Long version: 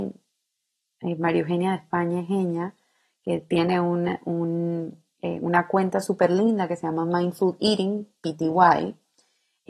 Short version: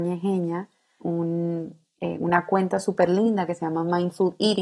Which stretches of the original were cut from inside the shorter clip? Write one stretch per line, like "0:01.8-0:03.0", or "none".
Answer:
0:03.1-0:04.2